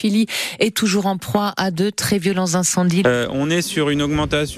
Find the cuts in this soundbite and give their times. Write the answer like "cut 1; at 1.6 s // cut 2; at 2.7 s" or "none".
cut 1; at 3.0 s